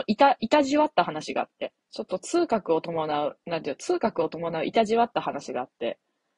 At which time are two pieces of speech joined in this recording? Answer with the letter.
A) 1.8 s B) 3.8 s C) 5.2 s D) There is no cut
A